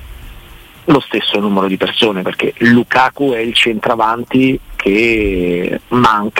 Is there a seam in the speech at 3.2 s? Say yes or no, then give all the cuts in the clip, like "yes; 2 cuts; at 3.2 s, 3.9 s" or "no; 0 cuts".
no; 0 cuts